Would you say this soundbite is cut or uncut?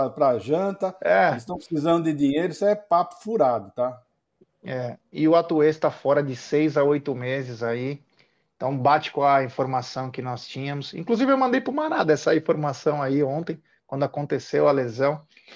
uncut